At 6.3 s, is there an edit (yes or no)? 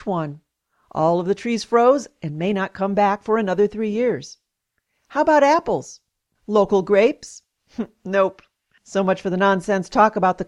yes